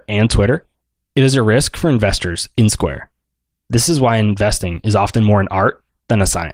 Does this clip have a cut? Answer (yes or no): yes